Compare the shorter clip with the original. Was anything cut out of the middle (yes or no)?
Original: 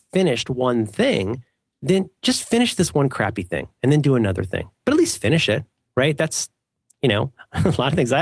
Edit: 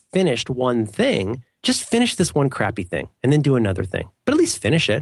yes